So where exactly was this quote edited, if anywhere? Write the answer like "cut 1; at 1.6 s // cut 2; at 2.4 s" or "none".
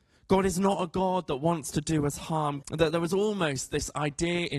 cut 1; at 2.6 s

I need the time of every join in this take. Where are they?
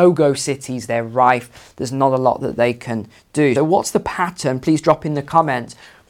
cut 1; at 3.6 s

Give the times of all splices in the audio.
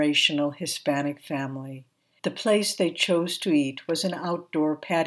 cut 1; at 2.2 s

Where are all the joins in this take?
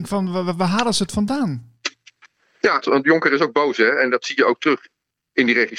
cut 1; at 2.8 s

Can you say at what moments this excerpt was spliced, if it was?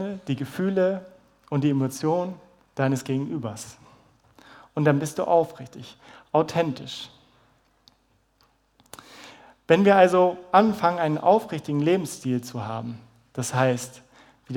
none

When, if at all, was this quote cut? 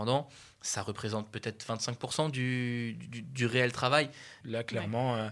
cut 1; at 4.4 s

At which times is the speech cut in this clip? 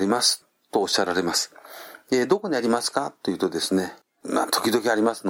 cut 1; at 4.0 s

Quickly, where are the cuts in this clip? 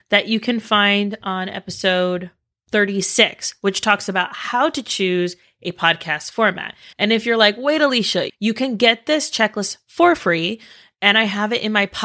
cut 1; at 6.9 s // cut 2; at 8.3 s

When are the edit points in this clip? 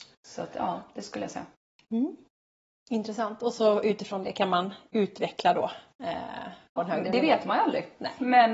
cut 1; at 6.8 s

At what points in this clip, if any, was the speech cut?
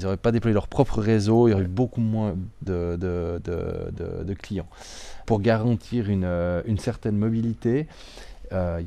cut 1; at 2.7 s // cut 2; at 5.2 s

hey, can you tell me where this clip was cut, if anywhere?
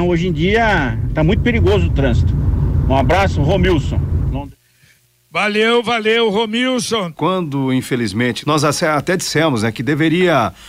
cut 1; at 7.1 s // cut 2; at 8.4 s

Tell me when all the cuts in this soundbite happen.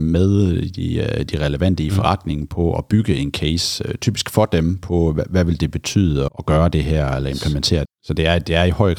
cut 1; at 6.3 s // cut 2; at 7.9 s

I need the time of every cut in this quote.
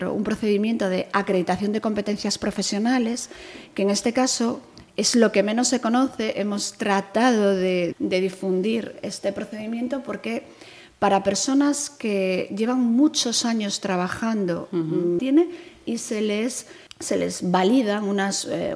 cut 1; at 7.9 s // cut 2; at 15.2 s // cut 3; at 16.9 s

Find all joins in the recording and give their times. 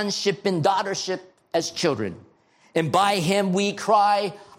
none

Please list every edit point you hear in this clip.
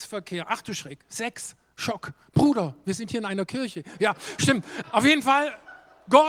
cut 1; at 4.8 s

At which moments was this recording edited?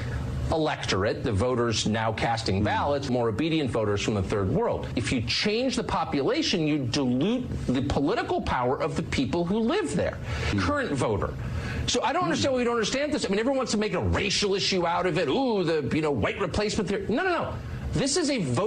cut 1; at 3.1 s // cut 2; at 10.5 s

